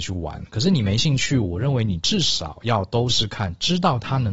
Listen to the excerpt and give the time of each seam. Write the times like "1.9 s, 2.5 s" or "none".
3.1 s